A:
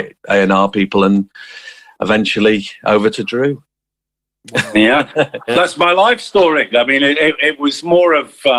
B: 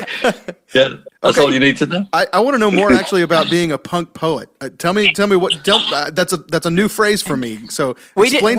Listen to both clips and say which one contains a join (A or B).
A